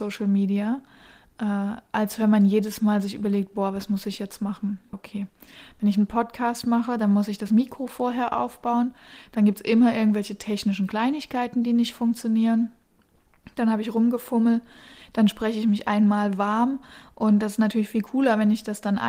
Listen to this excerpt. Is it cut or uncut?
cut